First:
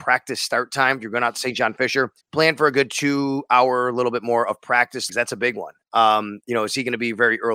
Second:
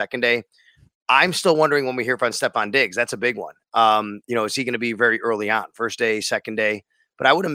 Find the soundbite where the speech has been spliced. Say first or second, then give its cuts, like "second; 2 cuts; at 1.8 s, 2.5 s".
first; 2 cuts; at 2.2 s, 5.1 s